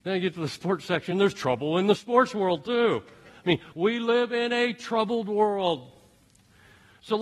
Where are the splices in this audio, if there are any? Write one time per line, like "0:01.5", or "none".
none